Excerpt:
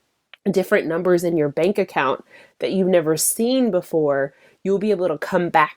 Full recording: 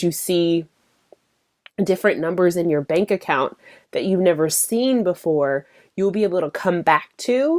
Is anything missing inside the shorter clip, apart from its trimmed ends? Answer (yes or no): no